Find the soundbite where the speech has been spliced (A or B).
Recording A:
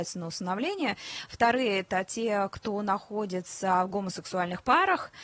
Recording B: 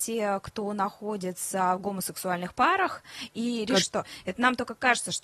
B